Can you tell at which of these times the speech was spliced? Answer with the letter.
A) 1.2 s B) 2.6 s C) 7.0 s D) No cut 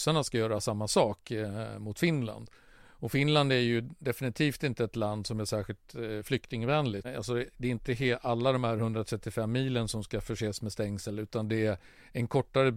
C